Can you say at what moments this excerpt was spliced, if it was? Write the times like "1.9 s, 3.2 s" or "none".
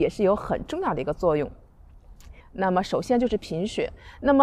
2.4 s